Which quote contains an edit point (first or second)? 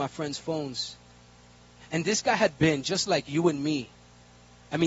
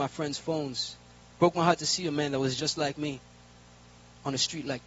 second